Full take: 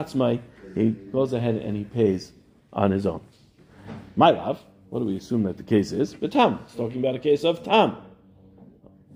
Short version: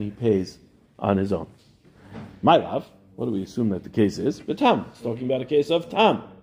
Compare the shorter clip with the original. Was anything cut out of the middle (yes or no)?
no